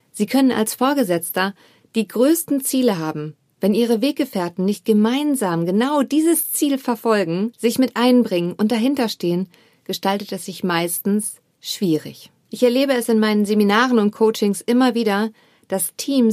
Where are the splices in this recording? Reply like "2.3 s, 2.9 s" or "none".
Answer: none